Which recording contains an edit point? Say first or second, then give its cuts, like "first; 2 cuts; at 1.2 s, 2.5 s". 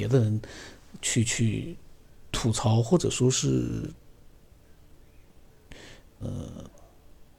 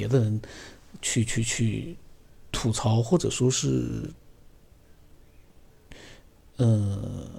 first; 2 cuts; at 1.2 s, 6.2 s